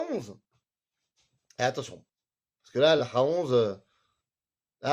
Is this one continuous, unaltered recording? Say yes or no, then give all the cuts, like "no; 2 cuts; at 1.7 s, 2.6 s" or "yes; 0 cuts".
no; 1 cut; at 3.0 s